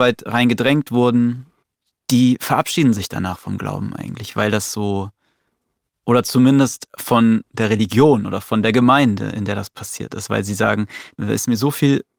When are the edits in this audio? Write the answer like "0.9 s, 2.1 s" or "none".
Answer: none